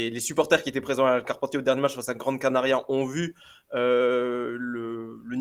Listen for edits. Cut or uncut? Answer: uncut